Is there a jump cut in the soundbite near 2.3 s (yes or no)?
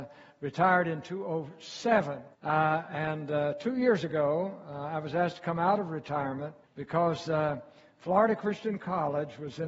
yes